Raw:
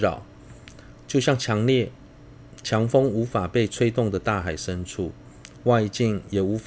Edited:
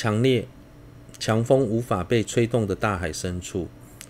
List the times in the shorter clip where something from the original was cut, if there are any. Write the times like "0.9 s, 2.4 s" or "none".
none